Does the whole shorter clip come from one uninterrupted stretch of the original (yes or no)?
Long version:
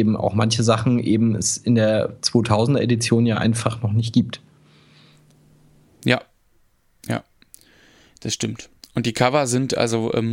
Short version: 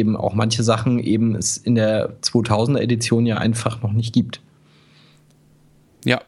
yes